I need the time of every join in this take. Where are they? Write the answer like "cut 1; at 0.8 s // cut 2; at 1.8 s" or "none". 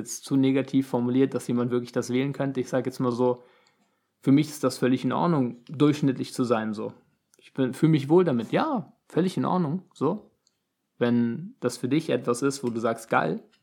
none

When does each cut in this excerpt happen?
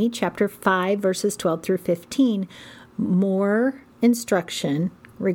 none

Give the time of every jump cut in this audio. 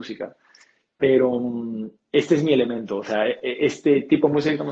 none

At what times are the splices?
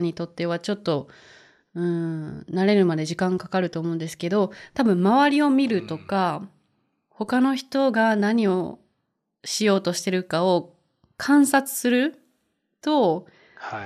none

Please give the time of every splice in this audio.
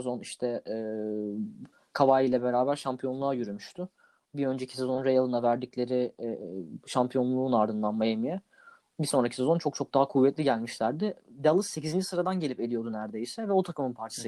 none

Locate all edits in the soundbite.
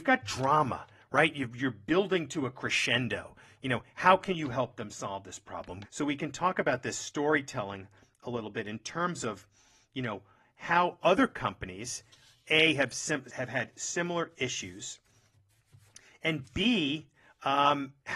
cut 1; at 5.8 s // cut 2; at 13.3 s

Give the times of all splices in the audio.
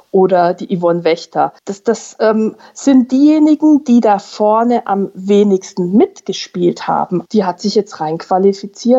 cut 1; at 1.6 s // cut 2; at 7.3 s

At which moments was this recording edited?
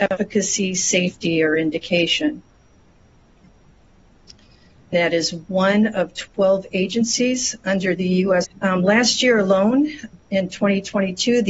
cut 1; at 4.9 s // cut 2; at 8.5 s

